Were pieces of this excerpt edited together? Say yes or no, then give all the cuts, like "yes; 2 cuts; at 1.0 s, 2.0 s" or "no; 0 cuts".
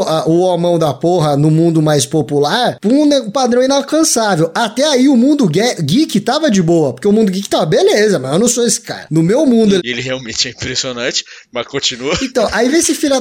yes; 1 cut; at 9.8 s